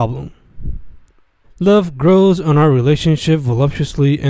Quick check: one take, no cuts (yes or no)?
no